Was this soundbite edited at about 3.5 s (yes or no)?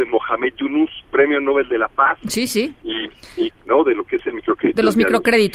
yes